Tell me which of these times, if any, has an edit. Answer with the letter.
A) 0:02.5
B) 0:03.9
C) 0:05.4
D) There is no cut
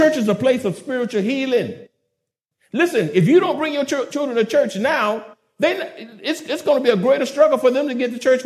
D